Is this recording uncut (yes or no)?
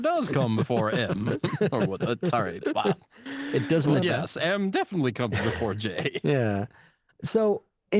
no